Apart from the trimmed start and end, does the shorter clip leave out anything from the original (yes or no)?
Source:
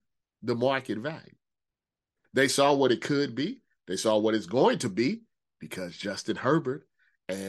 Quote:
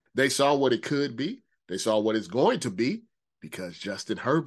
no